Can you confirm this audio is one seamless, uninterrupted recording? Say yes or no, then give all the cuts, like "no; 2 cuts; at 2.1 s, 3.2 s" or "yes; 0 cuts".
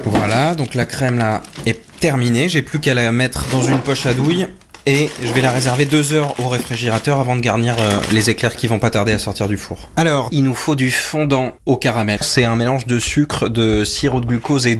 no; 2 cuts; at 10.3 s, 12.2 s